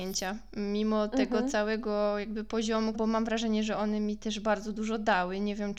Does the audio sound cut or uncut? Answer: cut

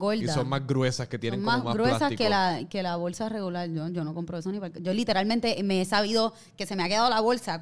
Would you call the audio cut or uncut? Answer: uncut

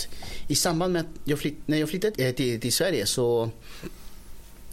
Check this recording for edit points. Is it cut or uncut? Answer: cut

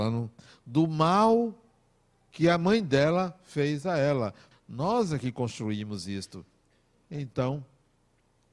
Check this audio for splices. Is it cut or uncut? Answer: cut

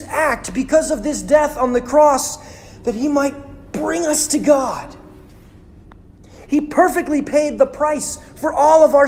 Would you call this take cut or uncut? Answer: cut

